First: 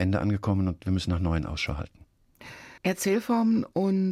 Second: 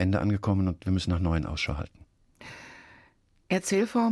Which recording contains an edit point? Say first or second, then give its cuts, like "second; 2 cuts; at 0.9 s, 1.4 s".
first; 1 cut; at 2.8 s